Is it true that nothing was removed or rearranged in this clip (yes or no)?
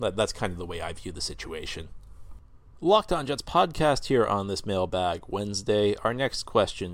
yes